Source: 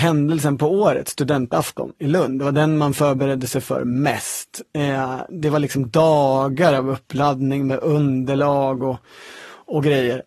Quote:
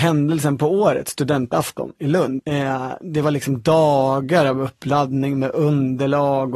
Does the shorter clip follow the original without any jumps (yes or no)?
no